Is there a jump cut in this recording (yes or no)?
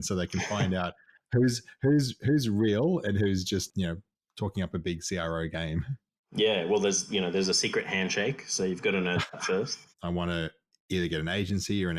yes